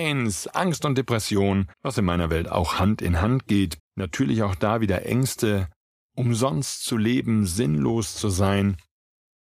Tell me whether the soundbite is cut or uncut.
cut